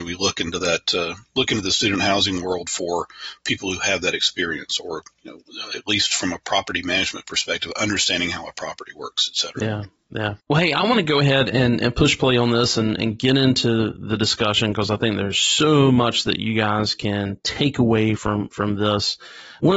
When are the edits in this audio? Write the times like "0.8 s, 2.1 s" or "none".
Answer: none